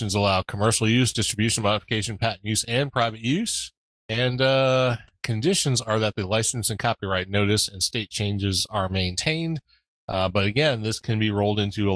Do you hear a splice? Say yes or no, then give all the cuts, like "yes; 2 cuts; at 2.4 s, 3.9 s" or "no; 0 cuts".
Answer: no; 0 cuts